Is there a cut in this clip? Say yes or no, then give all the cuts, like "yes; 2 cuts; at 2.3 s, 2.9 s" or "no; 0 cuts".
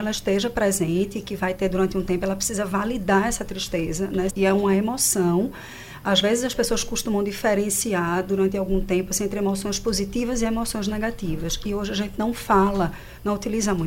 yes; 1 cut; at 4.3 s